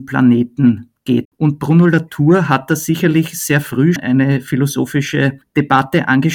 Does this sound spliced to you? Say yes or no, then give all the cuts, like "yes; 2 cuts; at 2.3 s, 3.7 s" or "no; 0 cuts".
yes; 2 cuts; at 1.2 s, 4.0 s